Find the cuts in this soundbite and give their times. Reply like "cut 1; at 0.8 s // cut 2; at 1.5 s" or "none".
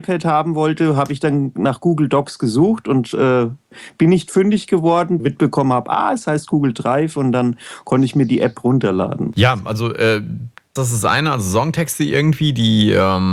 cut 1; at 5.2 s // cut 2; at 10.8 s